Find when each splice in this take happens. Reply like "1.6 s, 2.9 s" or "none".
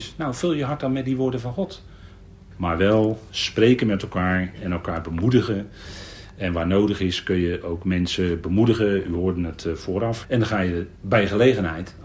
2.5 s, 10.2 s